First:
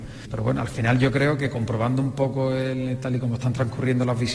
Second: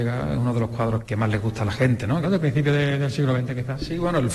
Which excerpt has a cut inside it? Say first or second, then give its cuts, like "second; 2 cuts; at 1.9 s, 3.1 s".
second; 1 cut; at 2.2 s